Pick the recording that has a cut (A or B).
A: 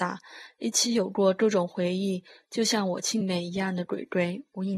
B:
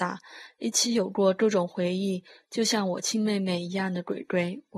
A